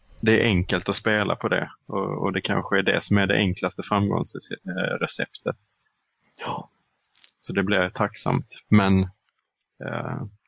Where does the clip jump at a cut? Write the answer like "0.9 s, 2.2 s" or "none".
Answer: none